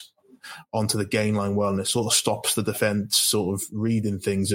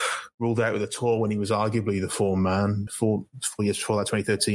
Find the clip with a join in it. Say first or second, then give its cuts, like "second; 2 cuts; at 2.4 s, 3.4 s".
second; 1 cut; at 2.9 s